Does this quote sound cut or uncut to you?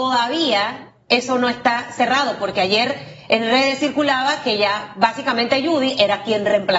uncut